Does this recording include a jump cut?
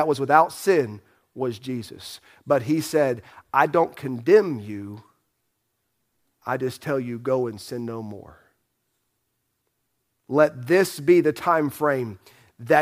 no; 0 cuts

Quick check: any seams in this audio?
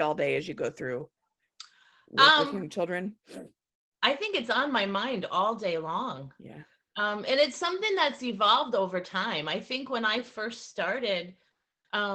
no; 0 cuts

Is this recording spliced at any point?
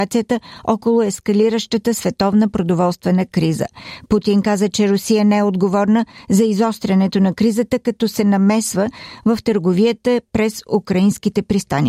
no; 0 cuts

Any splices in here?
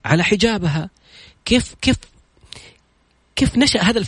no; 0 cuts

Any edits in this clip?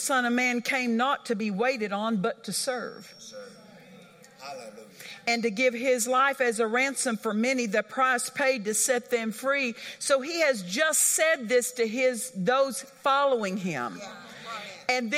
no; 0 cuts

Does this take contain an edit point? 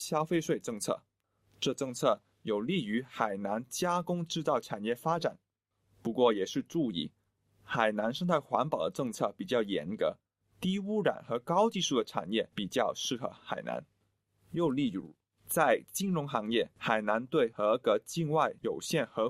no; 0 cuts

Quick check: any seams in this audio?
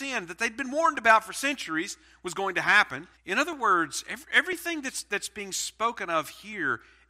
yes; 1 cut; at 3.2 s

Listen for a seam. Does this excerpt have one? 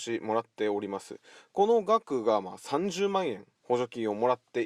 yes; 1 cut; at 3.5 s

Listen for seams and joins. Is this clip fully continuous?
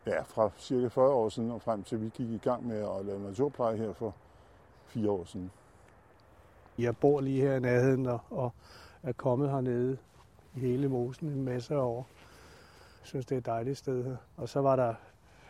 no; 1 cut; at 14.3 s

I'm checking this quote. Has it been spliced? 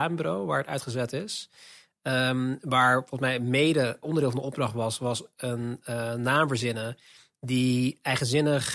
yes; 1 cut; at 4.0 s

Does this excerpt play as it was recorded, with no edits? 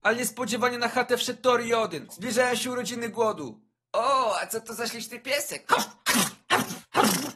no; 1 cut; at 2.1 s

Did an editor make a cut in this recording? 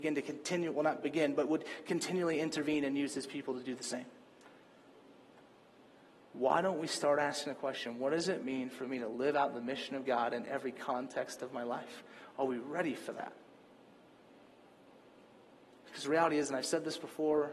no; 0 cuts

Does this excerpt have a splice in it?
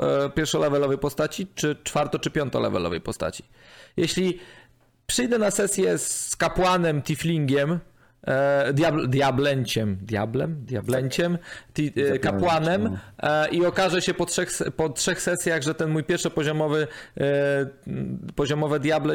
no; 0 cuts

